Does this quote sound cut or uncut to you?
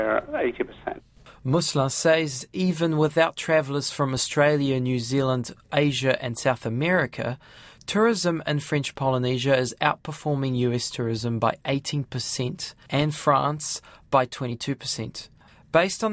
uncut